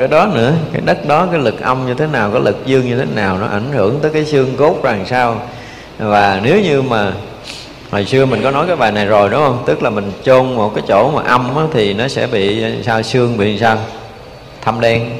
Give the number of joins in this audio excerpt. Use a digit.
0